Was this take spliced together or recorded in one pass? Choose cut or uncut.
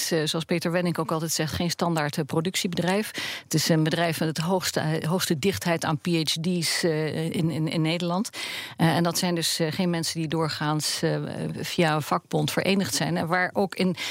uncut